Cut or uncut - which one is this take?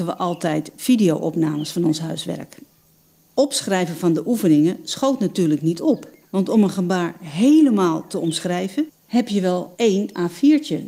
uncut